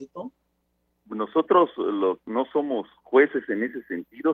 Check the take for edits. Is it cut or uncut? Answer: uncut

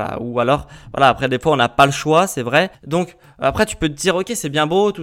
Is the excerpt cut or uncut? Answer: cut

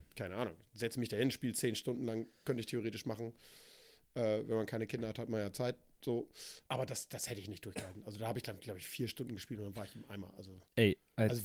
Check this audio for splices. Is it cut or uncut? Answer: cut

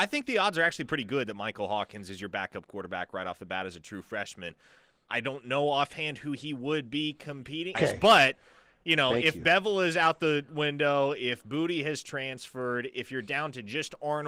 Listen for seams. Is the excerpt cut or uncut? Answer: cut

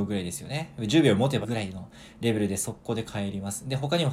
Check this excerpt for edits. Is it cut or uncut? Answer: cut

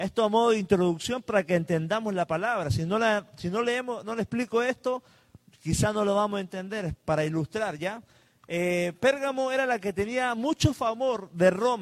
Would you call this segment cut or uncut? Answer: uncut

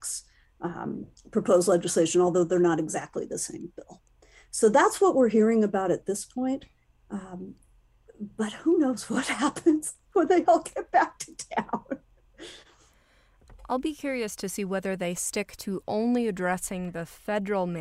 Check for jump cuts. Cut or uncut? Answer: uncut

